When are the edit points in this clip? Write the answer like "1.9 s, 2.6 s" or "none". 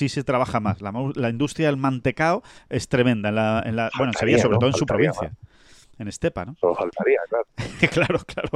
none